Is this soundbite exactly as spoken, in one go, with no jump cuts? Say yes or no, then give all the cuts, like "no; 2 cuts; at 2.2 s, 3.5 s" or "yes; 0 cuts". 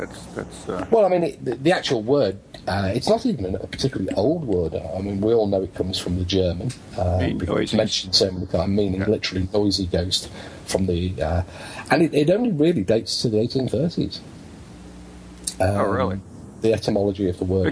yes; 0 cuts